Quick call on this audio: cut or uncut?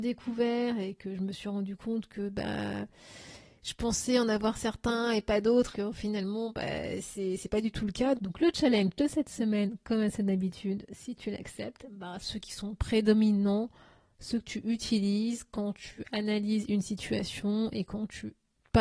cut